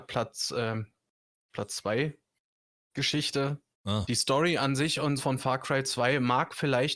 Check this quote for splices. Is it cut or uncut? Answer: cut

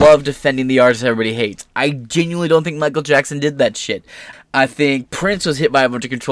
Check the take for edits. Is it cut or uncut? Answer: cut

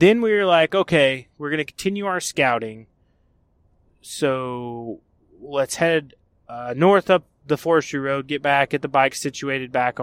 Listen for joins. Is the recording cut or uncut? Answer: uncut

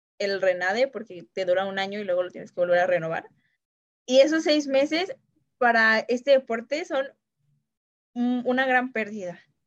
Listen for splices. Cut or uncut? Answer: cut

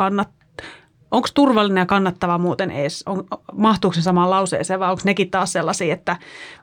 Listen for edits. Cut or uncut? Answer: cut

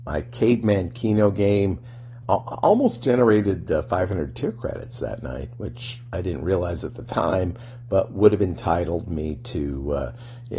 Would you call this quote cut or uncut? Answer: cut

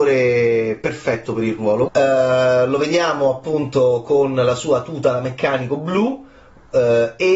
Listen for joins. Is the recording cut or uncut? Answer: cut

